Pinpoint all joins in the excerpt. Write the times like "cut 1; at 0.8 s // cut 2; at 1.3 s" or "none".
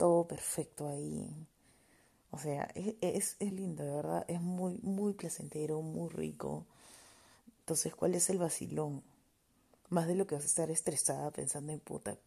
cut 1; at 3.5 s // cut 2; at 7.6 s